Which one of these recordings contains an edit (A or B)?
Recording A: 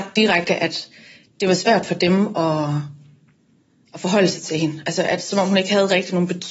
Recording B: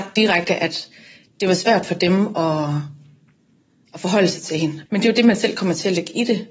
B